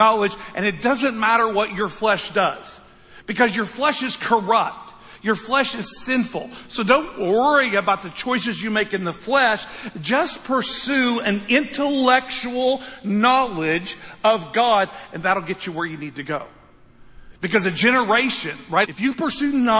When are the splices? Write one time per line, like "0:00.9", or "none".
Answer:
0:17.4
0:18.9